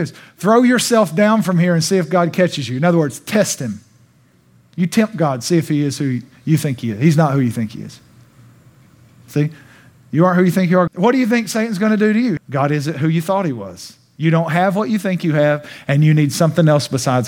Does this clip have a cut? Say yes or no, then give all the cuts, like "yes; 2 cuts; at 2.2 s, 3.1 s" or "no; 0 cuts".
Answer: yes; 2 cuts; at 10.9 s, 12.4 s